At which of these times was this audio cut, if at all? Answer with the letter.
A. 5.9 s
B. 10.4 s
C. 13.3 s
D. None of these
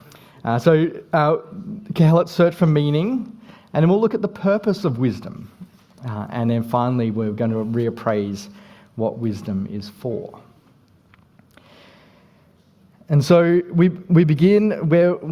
D